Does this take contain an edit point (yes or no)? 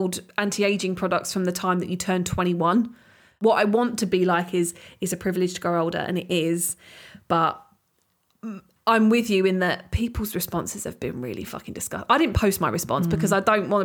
no